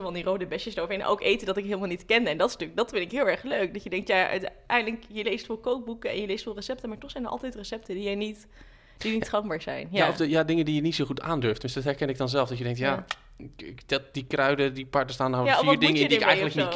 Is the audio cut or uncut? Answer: uncut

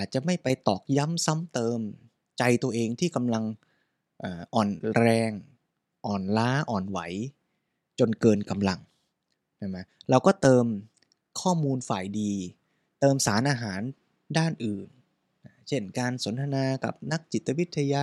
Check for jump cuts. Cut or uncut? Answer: uncut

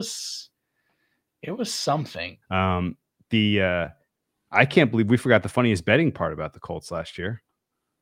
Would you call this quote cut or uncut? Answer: cut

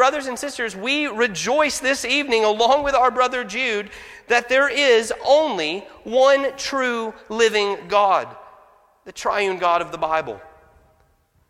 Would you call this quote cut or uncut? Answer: uncut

